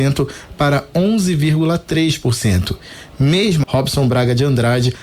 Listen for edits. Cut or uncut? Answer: cut